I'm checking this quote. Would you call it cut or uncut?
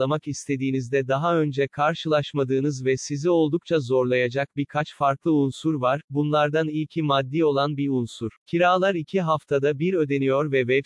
cut